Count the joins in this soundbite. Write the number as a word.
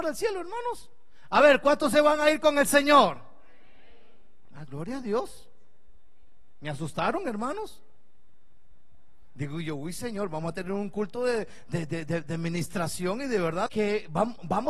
one